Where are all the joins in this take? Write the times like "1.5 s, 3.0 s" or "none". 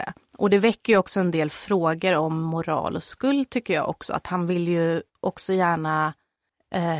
5.1 s